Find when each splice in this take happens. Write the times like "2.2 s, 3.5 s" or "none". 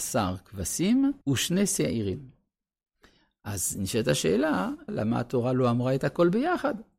1.2 s, 4.9 s

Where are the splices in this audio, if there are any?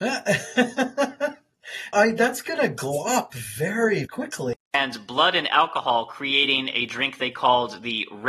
1.9 s, 4.0 s

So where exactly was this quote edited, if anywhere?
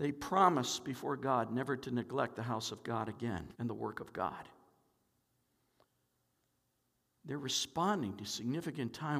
3.5 s

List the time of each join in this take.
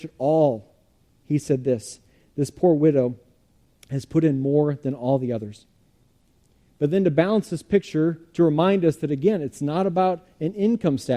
none

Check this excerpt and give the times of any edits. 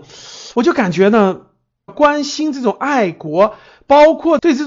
1.9 s

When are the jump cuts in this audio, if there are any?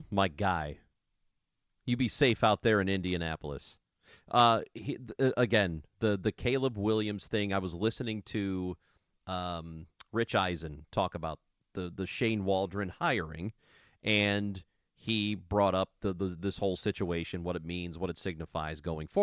none

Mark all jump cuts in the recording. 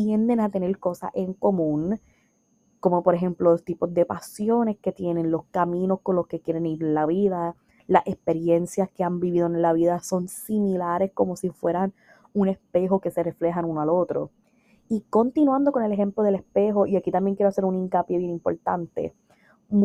none

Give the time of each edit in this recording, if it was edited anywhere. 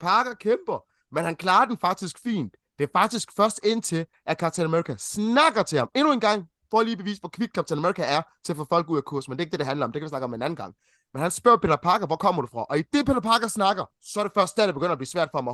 13.9 s

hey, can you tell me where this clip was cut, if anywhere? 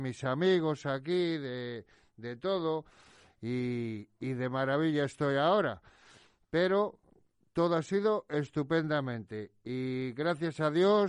none

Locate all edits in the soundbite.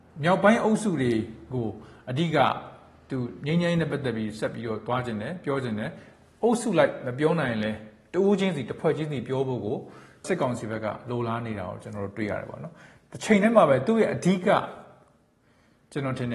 none

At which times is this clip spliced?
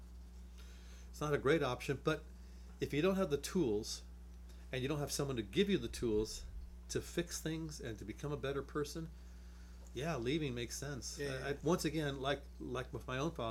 11.6 s

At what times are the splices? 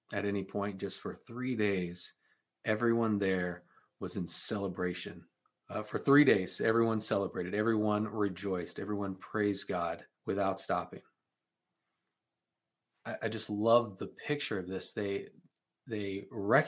5.6 s, 10.1 s

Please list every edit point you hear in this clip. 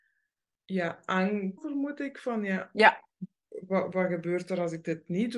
1.6 s

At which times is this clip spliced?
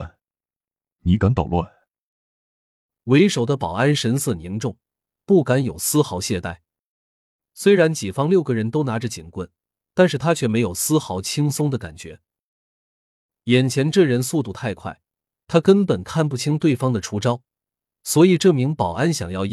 none

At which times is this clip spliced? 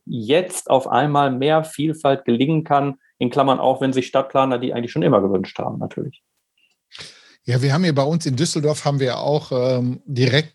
none

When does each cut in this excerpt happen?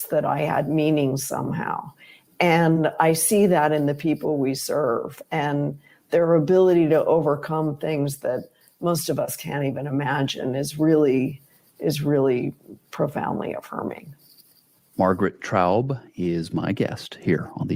none

